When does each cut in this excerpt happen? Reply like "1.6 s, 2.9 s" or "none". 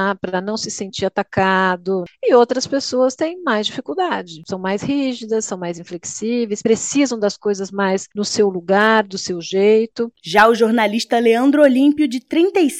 10.2 s